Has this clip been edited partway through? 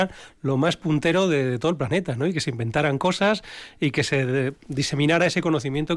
no; 0 cuts

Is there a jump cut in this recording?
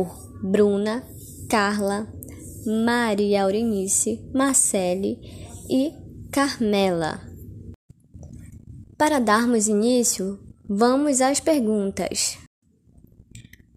no; 0 cuts

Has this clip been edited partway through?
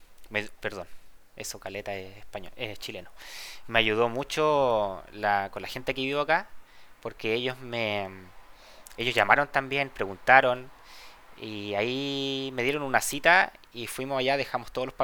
no; 0 cuts

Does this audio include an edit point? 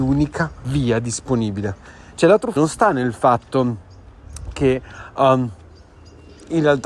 yes; 1 cut; at 2.6 s

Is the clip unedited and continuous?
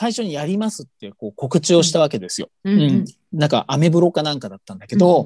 yes; 0 cuts

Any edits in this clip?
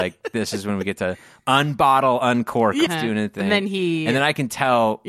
yes; 1 cut; at 2.9 s

